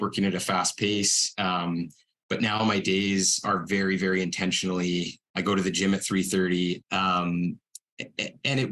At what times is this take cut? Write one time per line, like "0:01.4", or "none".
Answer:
0:05.2
0:06.8